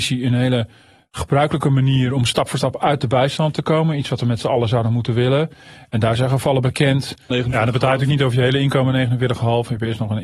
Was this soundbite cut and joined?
yes; 1 cut; at 7.3 s

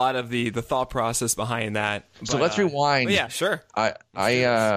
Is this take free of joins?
no; 2 cuts; at 2.1 s, 3.3 s

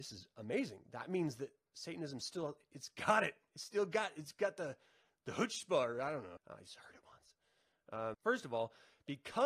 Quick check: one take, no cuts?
no; 2 cuts; at 6.4 s, 8.1 s

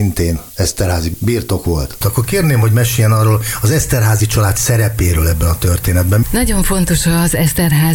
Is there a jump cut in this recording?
yes; 1 cut; at 6.2 s

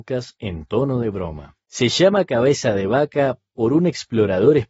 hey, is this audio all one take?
no; 1 cut; at 1.6 s

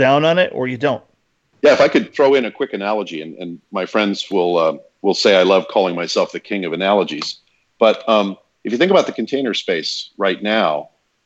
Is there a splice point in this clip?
no; 0 cuts

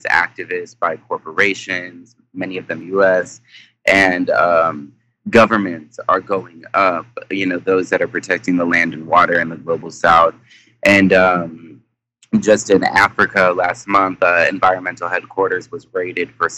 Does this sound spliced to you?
no; 0 cuts

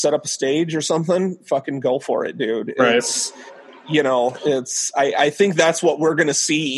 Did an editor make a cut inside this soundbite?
no; 0 cuts

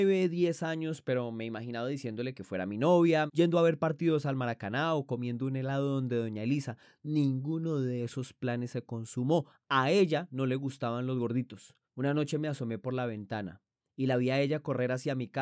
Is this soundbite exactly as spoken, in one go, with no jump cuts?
no; 2 cuts; at 3.3 s, 11.8 s

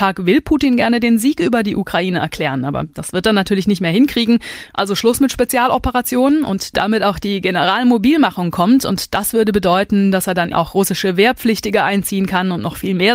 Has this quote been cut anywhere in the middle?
yes; 2 cuts; at 4.7 s, 10.5 s

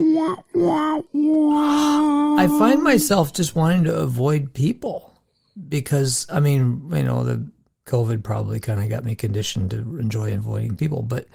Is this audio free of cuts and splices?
yes; 0 cuts

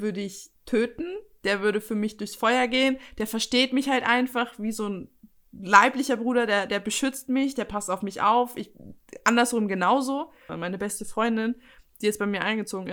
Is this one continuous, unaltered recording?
no; 1 cut; at 10.5 s

